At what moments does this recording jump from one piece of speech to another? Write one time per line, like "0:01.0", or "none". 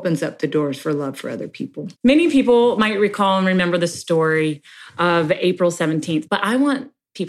0:01.9
0:06.3